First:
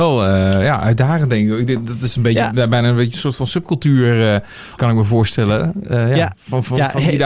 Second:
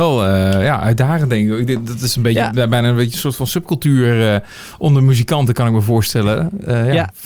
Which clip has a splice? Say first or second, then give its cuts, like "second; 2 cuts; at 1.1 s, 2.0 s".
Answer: first; 1 cut; at 4.8 s